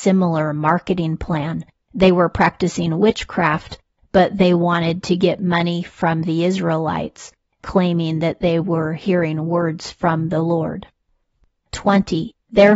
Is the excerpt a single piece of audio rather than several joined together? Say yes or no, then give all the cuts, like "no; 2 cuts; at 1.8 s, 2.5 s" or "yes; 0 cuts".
yes; 0 cuts